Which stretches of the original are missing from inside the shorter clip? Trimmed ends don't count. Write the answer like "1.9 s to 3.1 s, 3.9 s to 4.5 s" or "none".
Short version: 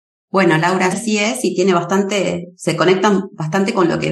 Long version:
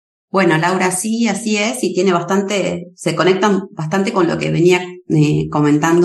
0.9 s to 1.3 s